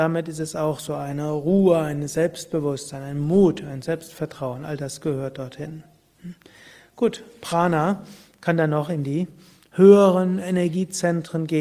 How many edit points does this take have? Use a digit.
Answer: 0